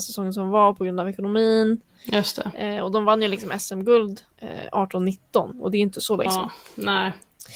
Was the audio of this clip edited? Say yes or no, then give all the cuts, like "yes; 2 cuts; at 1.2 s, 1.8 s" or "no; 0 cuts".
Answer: yes; 2 cuts; at 4.3 s, 6.3 s